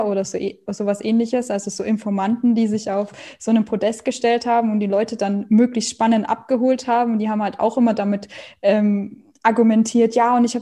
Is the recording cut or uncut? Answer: uncut